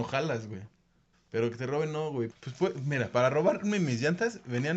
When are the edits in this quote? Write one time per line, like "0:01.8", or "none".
0:01.1
0:02.3